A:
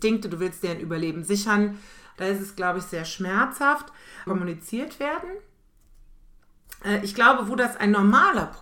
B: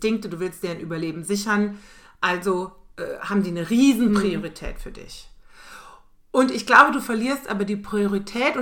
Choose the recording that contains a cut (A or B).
A